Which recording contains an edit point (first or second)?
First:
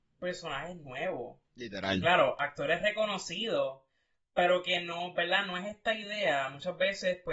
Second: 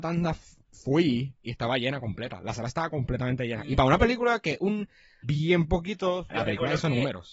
second